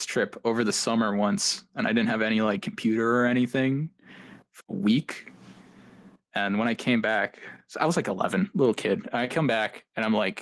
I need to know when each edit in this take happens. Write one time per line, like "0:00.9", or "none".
0:04.6